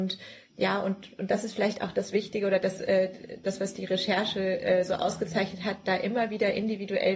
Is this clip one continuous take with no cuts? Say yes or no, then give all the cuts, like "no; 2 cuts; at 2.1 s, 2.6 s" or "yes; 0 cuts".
yes; 0 cuts